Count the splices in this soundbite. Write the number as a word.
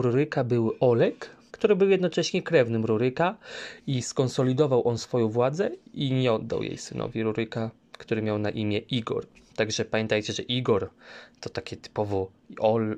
one